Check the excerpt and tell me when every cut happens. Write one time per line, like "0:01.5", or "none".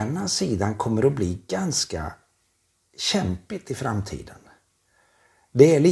none